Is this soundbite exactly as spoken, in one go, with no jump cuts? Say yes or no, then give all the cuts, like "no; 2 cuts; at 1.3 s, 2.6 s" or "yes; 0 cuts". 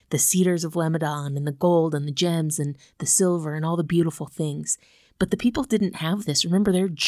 yes; 0 cuts